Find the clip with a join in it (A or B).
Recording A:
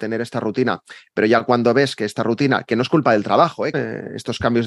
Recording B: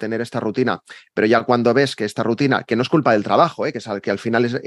A